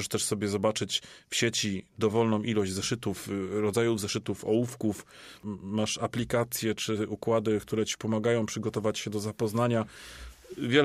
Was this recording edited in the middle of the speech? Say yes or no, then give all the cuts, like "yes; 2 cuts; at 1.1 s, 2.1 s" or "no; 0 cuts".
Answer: no; 0 cuts